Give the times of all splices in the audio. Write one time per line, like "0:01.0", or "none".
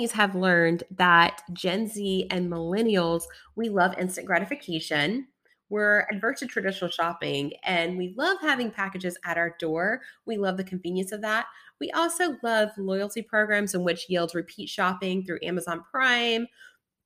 none